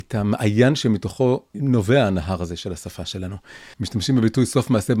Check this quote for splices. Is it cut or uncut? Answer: cut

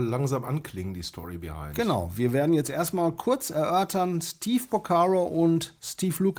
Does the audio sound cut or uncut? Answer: uncut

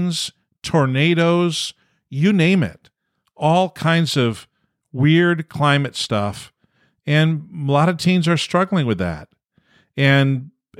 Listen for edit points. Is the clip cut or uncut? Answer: uncut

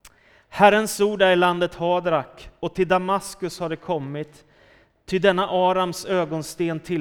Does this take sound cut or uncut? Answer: uncut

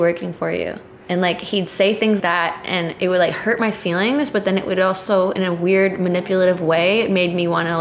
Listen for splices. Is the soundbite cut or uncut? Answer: cut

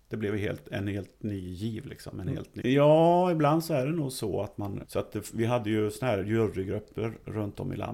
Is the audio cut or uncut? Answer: cut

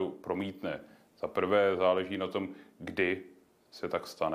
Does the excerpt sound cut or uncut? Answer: uncut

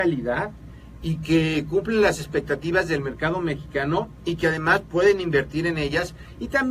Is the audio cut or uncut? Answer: uncut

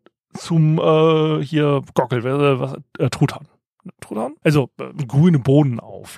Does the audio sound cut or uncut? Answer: cut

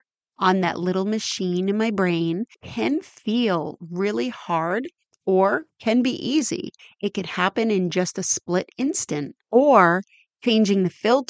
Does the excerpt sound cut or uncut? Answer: uncut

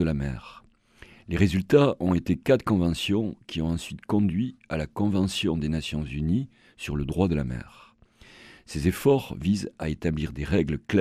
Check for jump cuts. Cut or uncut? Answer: uncut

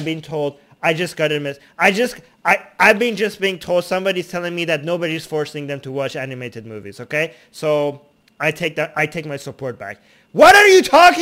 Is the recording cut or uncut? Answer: uncut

